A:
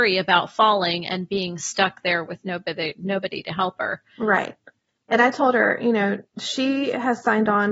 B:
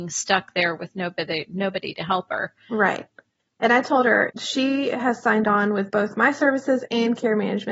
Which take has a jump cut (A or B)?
B